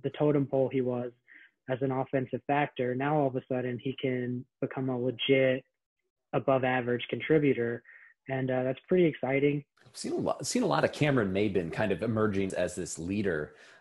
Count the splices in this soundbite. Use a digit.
2